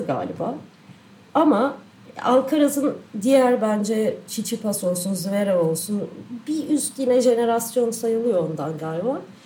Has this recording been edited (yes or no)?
no